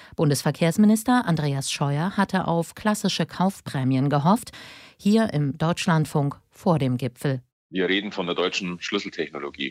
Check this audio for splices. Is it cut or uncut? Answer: uncut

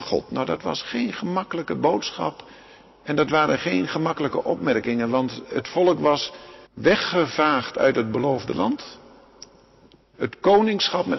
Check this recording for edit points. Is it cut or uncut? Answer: cut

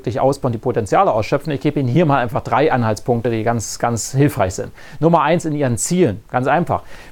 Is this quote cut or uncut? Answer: uncut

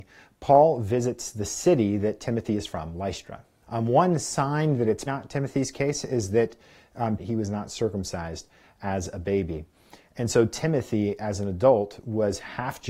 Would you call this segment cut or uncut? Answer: cut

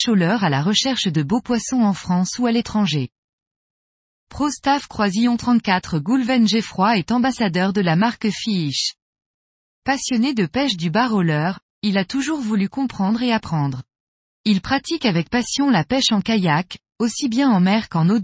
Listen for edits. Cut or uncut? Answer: cut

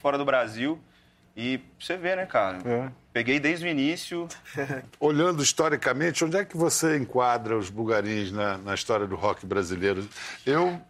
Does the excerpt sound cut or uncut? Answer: uncut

